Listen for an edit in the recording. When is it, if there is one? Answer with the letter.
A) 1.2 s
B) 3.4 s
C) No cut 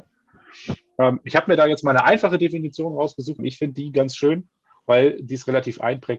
B